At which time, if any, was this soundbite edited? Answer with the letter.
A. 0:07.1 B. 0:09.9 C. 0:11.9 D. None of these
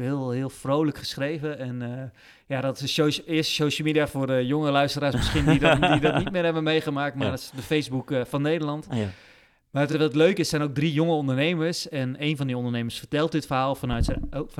D